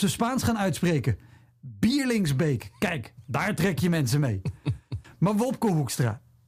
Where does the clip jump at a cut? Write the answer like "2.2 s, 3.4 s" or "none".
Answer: none